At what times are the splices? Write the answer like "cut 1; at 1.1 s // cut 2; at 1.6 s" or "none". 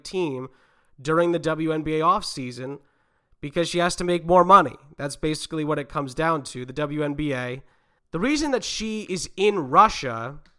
cut 1; at 8.0 s